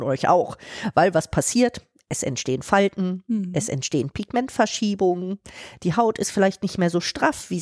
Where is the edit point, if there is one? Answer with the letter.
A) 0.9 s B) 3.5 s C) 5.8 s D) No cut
D